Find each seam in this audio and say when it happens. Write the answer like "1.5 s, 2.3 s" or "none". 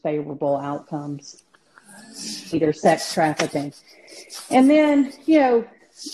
2.5 s